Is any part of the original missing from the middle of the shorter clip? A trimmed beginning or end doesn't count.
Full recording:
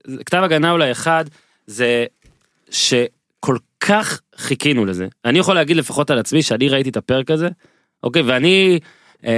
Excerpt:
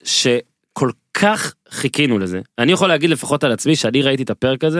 no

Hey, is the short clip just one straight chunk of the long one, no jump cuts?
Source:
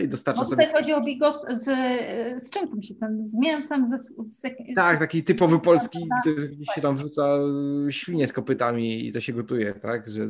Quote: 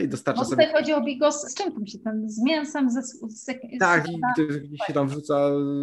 no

